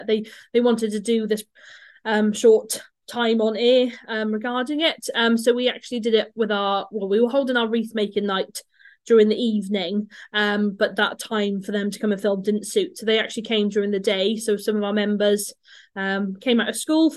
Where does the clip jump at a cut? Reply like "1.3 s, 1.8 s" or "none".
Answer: none